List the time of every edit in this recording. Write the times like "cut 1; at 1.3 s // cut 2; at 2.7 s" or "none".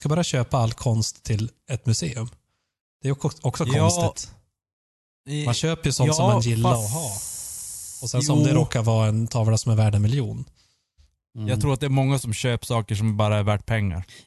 none